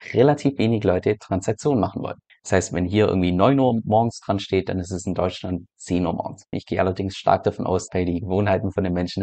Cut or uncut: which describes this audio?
cut